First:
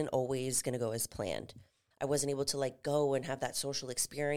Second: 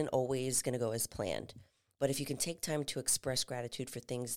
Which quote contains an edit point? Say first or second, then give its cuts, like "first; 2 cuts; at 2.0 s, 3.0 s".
first; 1 cut; at 1.9 s